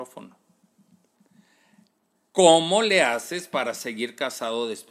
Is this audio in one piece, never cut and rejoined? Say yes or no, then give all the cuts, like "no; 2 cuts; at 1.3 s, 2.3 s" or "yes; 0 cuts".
yes; 0 cuts